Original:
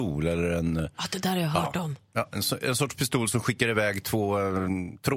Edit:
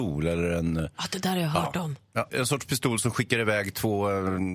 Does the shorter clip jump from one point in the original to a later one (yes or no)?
yes